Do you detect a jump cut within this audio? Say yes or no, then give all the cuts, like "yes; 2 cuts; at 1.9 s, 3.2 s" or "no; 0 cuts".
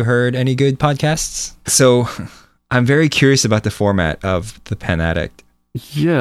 yes; 1 cut; at 1.7 s